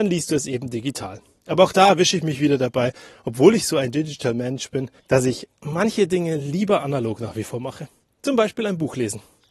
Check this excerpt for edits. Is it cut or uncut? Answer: cut